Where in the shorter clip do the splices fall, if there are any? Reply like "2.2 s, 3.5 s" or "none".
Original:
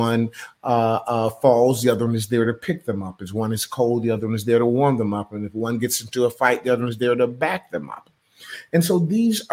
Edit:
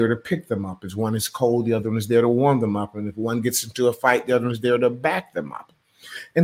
none